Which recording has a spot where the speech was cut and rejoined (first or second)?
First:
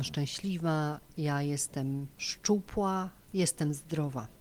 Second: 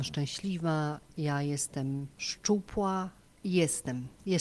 first